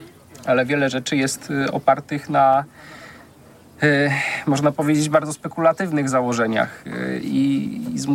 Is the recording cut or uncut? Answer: uncut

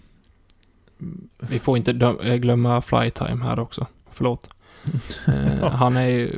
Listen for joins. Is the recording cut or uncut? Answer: cut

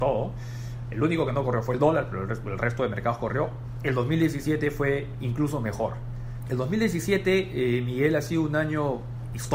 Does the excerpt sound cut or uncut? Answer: cut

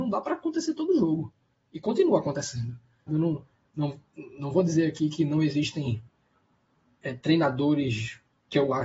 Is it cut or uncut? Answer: cut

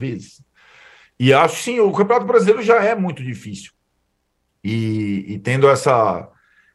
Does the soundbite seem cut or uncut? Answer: uncut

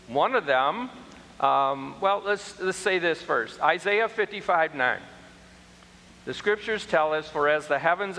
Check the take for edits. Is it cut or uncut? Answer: uncut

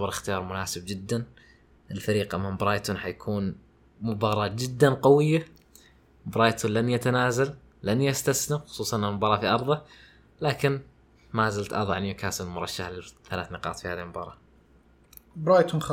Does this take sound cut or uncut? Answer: uncut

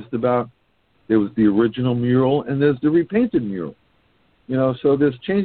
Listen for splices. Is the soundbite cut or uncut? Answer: cut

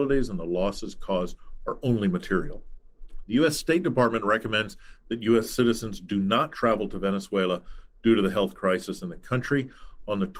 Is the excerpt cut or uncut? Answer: uncut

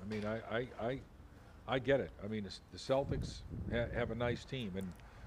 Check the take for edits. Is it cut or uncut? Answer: uncut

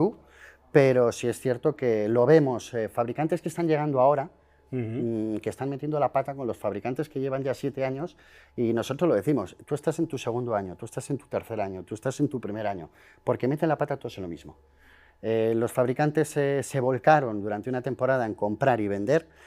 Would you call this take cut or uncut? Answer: uncut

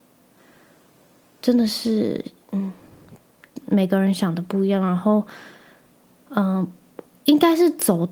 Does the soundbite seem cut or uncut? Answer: uncut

